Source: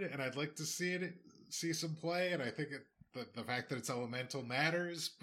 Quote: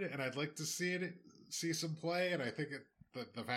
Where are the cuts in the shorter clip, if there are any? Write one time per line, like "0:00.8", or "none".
none